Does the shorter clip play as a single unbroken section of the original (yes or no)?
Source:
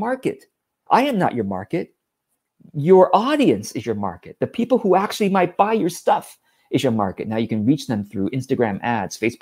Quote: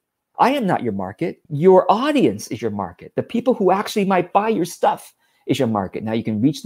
no